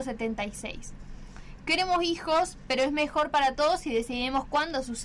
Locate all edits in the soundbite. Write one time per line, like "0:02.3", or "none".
none